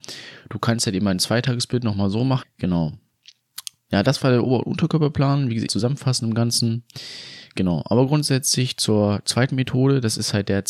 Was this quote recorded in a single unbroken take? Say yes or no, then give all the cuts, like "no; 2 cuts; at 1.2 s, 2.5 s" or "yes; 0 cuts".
no; 2 cuts; at 2.4 s, 5.7 s